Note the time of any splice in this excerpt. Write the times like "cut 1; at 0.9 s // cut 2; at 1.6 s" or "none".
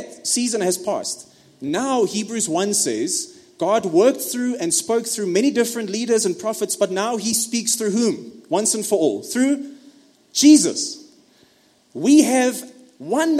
none